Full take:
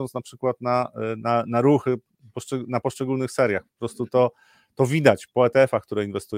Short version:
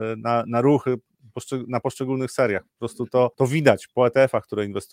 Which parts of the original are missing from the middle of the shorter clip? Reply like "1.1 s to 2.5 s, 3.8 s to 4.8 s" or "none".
4.3 s to 4.7 s